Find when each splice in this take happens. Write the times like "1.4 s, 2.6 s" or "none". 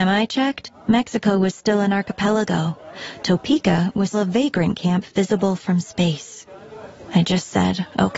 4.1 s, 7.1 s